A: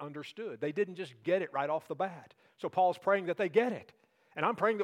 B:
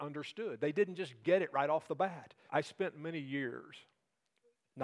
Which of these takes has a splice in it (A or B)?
B